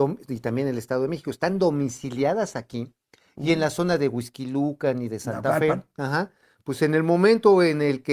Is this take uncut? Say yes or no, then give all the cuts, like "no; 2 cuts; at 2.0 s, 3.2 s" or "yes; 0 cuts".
yes; 0 cuts